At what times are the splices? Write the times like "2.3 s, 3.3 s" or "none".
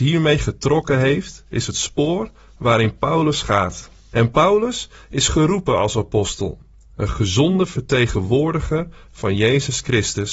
4.1 s